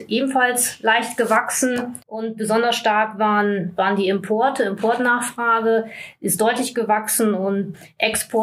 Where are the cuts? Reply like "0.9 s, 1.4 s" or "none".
2.0 s